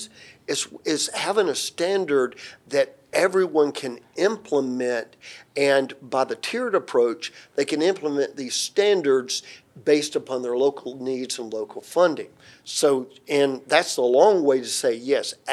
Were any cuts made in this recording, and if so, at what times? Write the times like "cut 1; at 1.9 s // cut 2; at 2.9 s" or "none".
none